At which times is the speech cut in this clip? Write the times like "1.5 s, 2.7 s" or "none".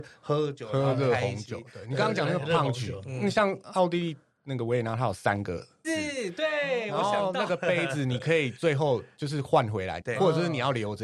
5.8 s, 10.0 s